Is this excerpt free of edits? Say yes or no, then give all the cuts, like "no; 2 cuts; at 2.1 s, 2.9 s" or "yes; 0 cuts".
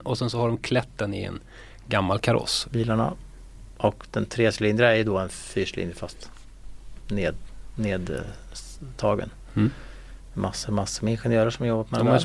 no; 2 cuts; at 2.6 s, 10.3 s